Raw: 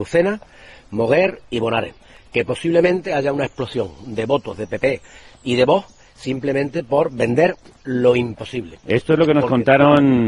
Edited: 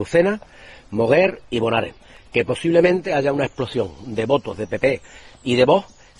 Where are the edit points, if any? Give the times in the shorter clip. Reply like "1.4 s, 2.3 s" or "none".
none